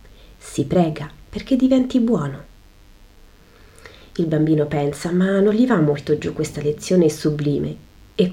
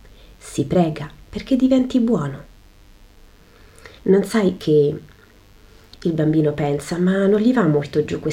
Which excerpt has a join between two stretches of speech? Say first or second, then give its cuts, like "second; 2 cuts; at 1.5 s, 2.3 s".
second; 2 cuts; at 4.0 s, 5.9 s